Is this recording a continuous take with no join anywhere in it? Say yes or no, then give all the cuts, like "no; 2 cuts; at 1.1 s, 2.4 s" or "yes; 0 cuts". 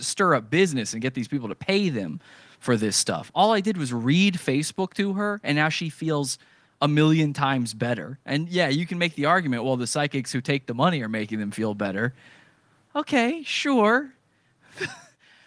yes; 0 cuts